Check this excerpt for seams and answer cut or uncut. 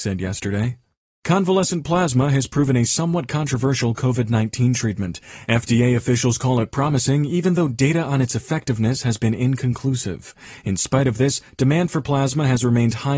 uncut